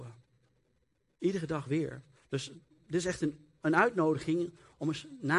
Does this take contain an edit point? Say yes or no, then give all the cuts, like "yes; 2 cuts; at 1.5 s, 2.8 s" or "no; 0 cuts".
yes; 1 cut; at 2.2 s